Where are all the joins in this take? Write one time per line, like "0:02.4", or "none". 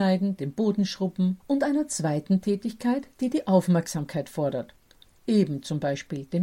0:01.4